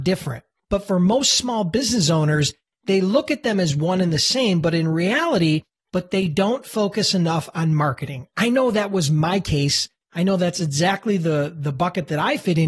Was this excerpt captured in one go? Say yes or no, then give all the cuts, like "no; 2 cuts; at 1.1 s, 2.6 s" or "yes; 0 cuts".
no; 1 cut; at 5.8 s